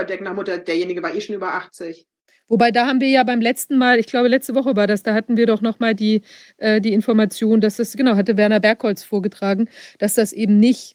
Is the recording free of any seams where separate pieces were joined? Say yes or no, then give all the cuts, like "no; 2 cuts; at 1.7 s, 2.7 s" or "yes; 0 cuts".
yes; 0 cuts